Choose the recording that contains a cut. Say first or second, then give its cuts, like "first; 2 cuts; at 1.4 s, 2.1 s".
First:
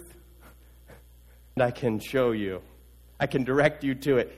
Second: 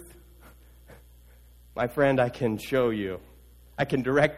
first; 1 cut; at 1.6 s